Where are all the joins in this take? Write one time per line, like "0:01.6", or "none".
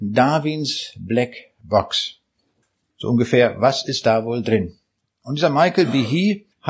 0:02.9